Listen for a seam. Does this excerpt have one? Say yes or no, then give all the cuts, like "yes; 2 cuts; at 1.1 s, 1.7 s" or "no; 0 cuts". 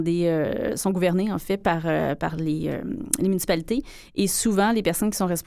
no; 0 cuts